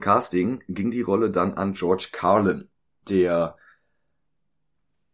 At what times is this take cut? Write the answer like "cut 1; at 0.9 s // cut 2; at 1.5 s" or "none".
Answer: cut 1; at 3.0 s